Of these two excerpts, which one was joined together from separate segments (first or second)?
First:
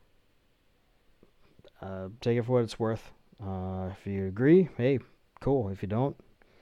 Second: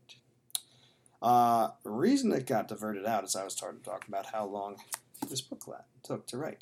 first